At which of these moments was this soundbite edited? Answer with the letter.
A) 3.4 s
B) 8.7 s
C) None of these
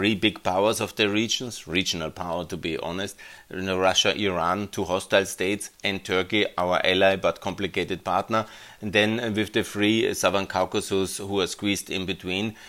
C